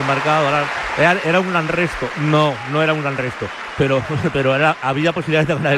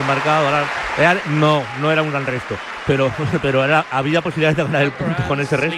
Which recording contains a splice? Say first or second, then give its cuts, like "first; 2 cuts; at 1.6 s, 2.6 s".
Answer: second; 1 cut; at 1.2 s